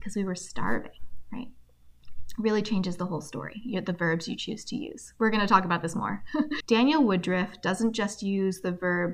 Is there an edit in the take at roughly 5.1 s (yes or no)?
no